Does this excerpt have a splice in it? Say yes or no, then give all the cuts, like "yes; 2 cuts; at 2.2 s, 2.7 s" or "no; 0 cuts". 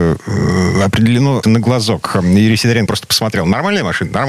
yes; 2 cuts; at 1.4 s, 2.9 s